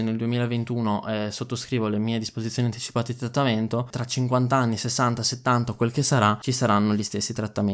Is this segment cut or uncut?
cut